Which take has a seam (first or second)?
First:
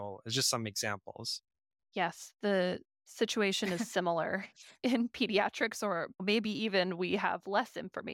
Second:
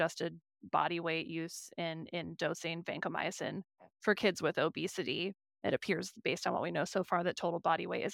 first